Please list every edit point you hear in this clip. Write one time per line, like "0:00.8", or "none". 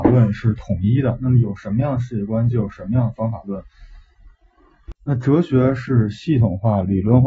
0:05.0